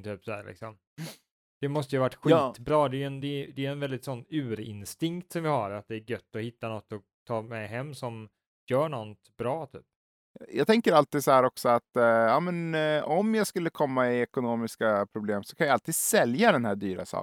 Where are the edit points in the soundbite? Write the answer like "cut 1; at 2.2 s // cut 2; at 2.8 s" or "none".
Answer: none